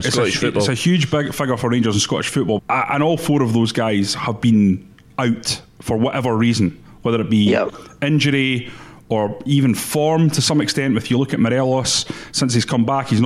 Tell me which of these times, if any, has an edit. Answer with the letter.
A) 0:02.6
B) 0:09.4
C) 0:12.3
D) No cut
A